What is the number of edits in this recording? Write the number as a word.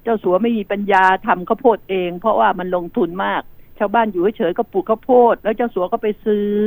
one